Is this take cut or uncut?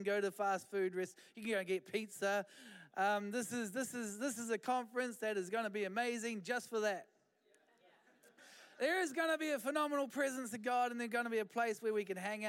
uncut